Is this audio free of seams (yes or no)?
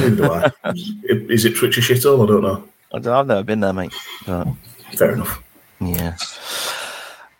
yes